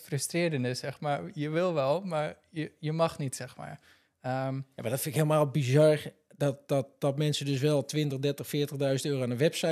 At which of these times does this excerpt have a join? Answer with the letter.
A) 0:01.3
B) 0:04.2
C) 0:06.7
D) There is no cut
D